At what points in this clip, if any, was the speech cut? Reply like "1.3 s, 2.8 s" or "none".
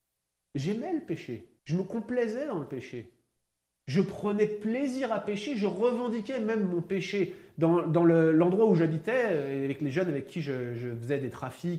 1.6 s